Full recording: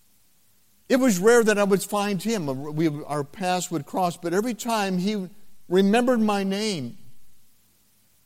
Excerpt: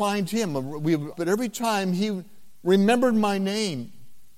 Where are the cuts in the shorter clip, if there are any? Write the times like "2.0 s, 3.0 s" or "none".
1.1 s